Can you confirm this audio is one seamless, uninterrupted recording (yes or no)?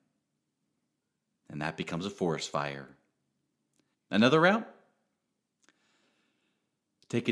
no